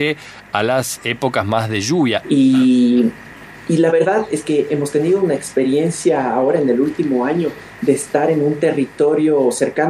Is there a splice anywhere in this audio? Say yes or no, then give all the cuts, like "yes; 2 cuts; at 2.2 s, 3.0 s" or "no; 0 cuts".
yes; 1 cut; at 2.2 s